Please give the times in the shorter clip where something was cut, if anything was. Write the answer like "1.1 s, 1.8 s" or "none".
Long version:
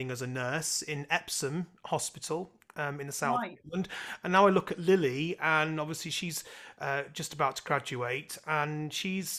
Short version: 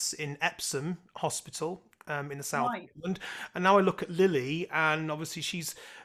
none